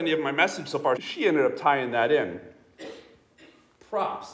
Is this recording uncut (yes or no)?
no